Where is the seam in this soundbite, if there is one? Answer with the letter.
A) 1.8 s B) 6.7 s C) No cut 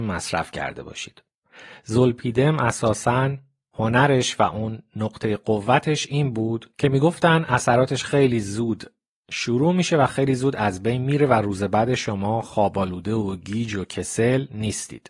B